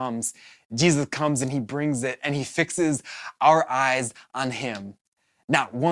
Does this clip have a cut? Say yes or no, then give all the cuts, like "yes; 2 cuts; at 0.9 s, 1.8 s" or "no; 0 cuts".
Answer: no; 0 cuts